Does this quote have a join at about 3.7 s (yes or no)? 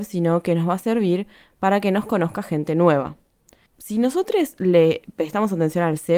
yes